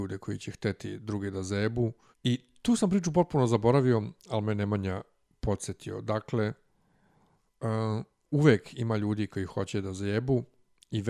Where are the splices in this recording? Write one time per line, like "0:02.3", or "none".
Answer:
0:02.1